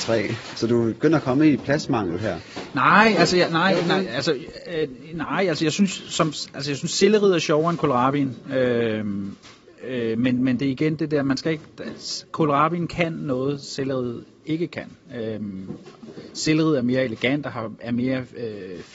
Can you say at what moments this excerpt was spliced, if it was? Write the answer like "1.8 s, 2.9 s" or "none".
none